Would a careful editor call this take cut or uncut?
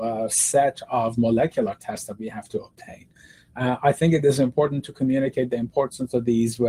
uncut